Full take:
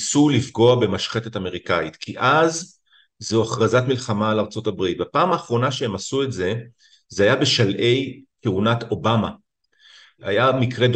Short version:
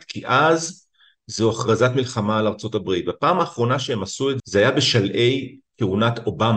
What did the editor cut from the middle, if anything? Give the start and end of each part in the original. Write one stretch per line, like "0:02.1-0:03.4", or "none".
0:06.3-0:07.0